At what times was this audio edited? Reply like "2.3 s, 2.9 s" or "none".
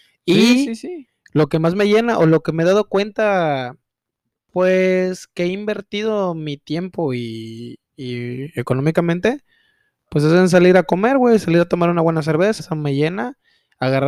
12.6 s